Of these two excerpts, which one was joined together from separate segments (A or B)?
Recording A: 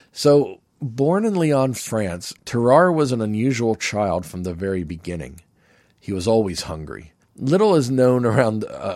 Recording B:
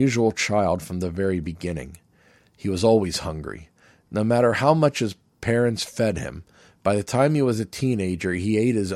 A